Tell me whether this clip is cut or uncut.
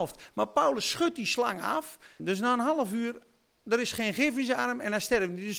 cut